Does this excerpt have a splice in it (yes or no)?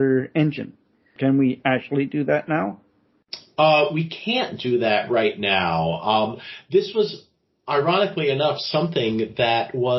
yes